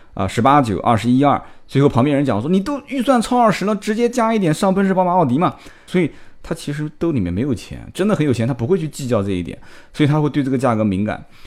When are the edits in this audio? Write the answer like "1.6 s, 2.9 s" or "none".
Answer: 5.9 s